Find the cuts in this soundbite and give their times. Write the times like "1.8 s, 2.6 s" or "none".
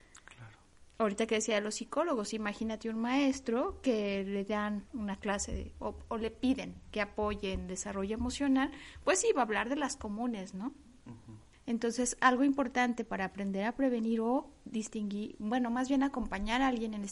11.5 s